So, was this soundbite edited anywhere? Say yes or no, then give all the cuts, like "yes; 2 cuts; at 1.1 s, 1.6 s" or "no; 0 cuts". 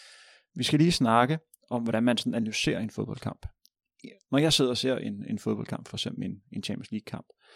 no; 0 cuts